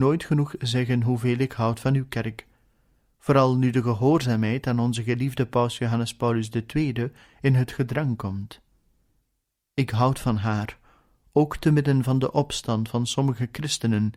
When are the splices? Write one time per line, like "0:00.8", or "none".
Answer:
none

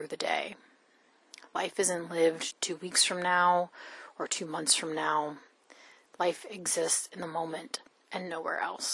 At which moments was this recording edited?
none

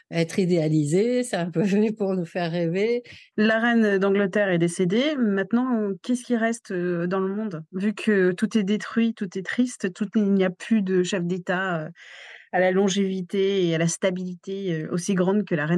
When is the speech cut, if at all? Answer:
0:03.3

